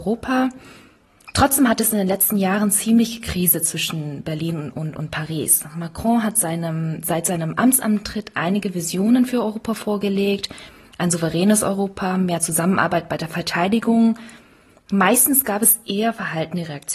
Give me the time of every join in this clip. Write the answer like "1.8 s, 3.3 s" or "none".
none